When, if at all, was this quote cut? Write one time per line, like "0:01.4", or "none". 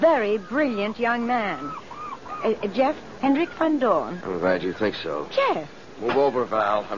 0:03.2
0:04.2
0:05.3